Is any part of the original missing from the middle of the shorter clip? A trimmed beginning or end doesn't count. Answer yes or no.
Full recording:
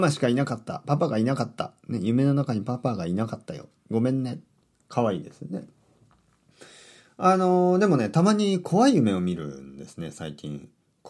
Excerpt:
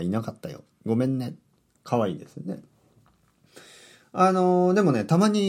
no